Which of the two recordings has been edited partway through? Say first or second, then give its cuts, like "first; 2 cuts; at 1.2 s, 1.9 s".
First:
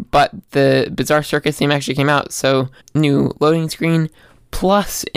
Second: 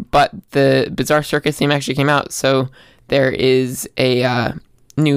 first; 1 cut; at 2.8 s